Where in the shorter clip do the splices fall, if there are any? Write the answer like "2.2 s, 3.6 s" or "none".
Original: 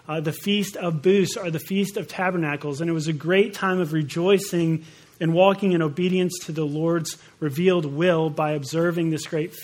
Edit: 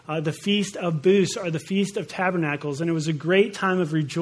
none